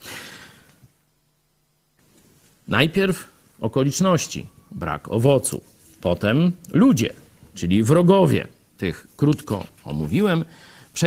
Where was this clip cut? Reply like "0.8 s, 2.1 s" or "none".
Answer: none